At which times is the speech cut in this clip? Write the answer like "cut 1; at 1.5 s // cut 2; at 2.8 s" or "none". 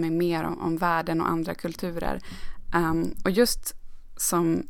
none